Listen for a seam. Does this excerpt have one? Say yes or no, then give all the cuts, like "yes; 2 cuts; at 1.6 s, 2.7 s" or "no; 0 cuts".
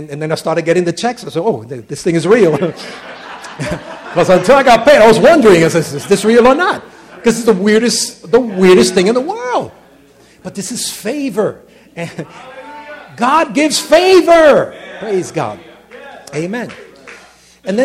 no; 0 cuts